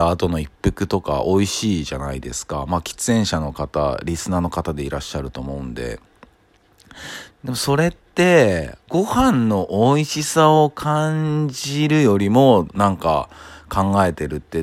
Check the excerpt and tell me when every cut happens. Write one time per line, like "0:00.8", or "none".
0:07.3
0:08.9
0:12.7